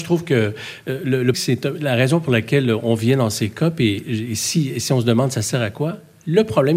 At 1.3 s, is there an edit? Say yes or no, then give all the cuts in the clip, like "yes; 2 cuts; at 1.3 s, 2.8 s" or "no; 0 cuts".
yes; 1 cut; at 1.3 s